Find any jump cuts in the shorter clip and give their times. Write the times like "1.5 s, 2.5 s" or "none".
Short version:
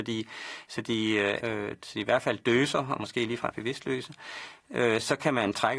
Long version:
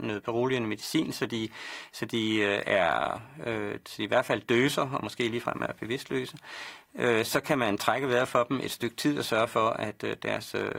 1.4 s, 3.5 s